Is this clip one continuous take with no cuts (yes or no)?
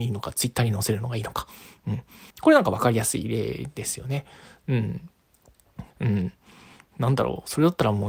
no